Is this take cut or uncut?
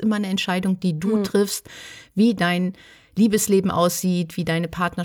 uncut